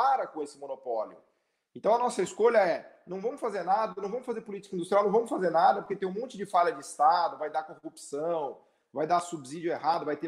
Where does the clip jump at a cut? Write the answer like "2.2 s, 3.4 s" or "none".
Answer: none